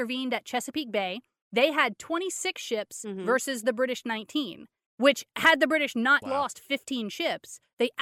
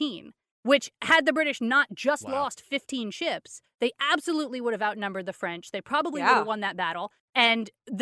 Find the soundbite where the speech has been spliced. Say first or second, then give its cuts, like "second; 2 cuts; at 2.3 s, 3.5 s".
first; 1 cut; at 6.2 s